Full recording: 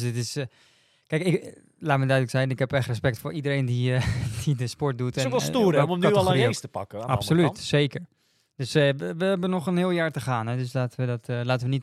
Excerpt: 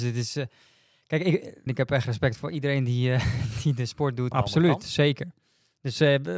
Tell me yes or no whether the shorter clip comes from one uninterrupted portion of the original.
no